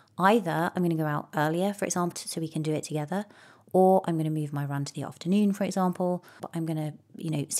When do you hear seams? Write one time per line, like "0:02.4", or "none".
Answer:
0:02.1
0:06.4

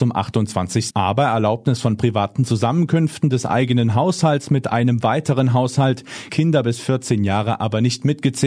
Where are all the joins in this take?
0:00.9
0:06.3

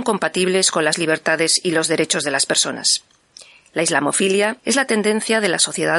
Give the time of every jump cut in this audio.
0:04.6

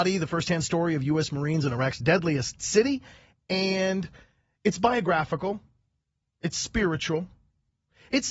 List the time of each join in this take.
none

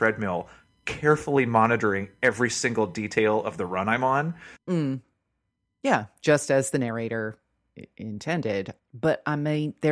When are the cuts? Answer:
0:04.6
0:08.8

